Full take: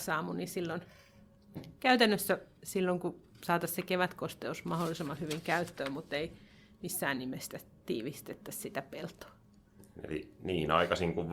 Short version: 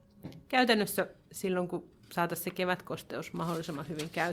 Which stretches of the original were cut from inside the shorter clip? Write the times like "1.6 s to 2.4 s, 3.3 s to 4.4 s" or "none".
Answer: none